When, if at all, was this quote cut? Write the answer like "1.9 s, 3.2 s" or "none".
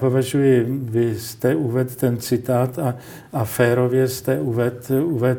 none